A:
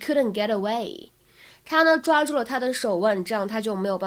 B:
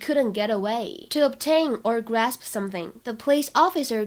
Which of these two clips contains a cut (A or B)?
B